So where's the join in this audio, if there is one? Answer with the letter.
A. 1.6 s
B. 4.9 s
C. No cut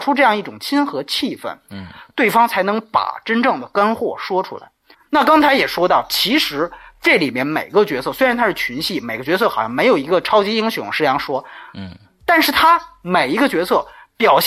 B